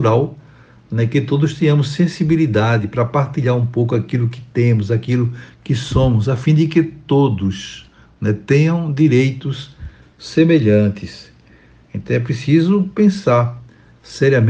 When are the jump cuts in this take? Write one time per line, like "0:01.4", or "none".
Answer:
none